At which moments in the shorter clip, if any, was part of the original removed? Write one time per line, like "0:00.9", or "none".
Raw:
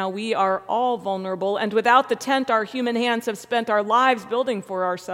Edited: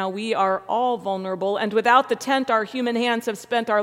none